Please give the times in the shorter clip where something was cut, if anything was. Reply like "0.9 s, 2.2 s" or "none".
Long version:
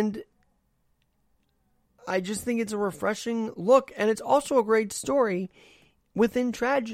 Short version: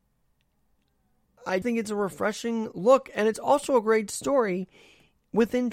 1.6 s